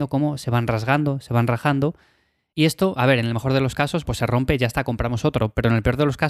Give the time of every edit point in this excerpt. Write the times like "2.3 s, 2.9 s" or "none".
4.0 s

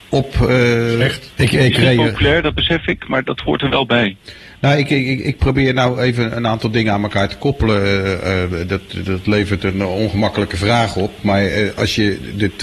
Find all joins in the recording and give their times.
1.3 s

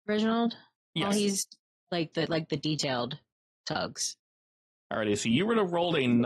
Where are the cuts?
none

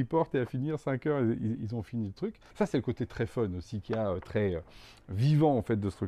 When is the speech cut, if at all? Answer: 2.5 s

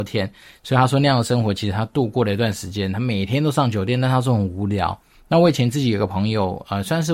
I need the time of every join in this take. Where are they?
5.1 s

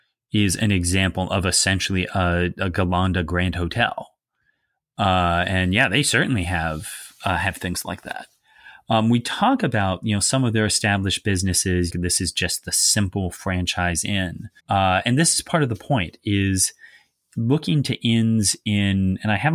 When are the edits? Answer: 11.9 s, 14.6 s

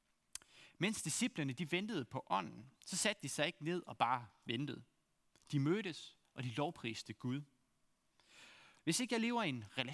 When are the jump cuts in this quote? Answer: 6.2 s, 8.8 s

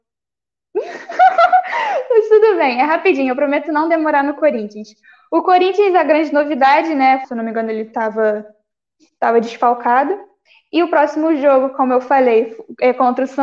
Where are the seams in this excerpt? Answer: 7.2 s

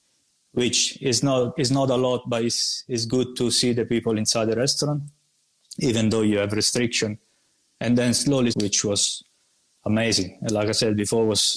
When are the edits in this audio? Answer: 8.5 s

